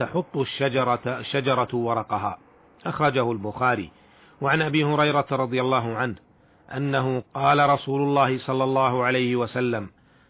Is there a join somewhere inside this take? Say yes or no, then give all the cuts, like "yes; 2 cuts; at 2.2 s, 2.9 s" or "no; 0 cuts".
yes; 1 cut; at 7.2 s